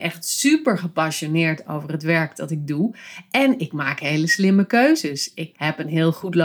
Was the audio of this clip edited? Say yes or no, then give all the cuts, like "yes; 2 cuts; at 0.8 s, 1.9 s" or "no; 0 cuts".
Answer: yes; 1 cut; at 5.5 s